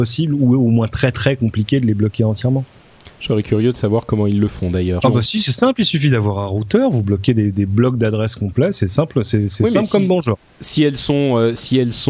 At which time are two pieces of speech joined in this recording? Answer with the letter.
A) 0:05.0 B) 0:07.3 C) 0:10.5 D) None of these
A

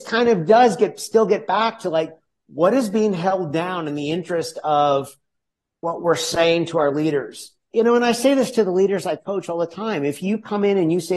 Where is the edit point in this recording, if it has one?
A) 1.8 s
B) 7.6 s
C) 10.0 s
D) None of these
D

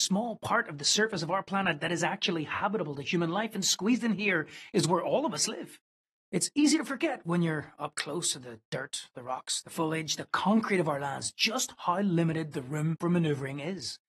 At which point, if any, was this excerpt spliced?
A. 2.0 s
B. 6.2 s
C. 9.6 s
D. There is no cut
D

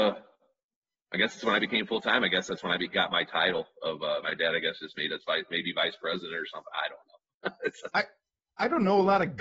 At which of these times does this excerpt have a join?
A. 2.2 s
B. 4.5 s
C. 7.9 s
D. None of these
C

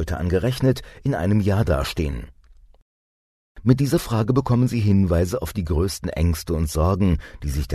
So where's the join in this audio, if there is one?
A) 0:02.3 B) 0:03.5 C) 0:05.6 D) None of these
D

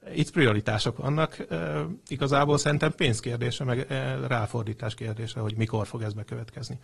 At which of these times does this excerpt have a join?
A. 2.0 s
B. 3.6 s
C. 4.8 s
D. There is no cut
D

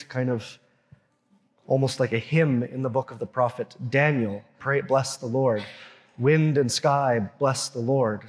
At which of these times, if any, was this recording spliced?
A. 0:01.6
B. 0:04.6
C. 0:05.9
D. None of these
B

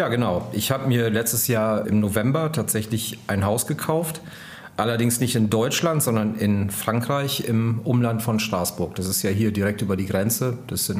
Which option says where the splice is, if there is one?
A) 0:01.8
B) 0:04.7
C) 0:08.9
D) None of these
A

